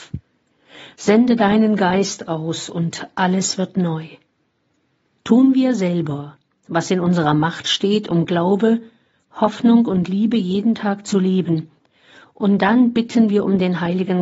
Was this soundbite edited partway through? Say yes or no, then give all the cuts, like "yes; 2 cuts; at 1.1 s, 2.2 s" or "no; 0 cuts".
yes; 1 cut; at 5.1 s